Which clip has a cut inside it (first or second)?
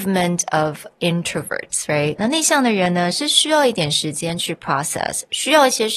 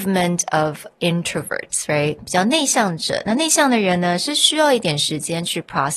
first